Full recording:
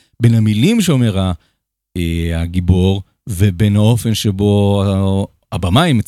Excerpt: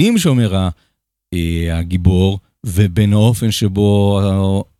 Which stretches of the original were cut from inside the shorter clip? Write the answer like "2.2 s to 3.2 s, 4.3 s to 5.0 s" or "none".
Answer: none